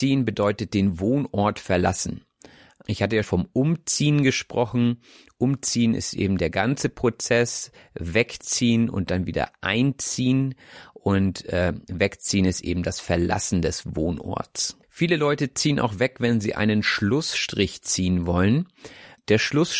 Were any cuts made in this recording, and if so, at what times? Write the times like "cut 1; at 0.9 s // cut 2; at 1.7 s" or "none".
cut 1; at 3.2 s